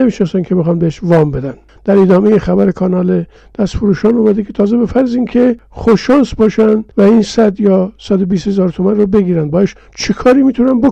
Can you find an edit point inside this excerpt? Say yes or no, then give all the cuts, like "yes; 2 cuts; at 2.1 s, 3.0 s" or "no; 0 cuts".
yes; 1 cut; at 6.9 s